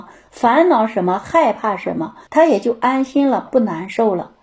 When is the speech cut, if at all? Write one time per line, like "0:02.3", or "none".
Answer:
0:02.3
0:03.5